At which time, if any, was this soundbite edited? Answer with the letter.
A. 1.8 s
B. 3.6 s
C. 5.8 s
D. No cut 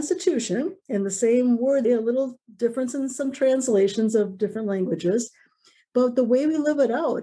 A